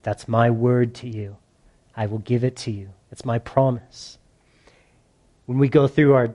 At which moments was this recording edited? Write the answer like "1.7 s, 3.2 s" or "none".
5.4 s